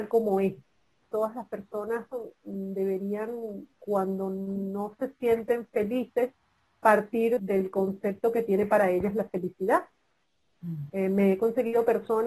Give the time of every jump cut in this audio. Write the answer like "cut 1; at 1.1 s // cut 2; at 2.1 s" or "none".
cut 1; at 1.0 s // cut 2; at 7.4 s // cut 3; at 10.9 s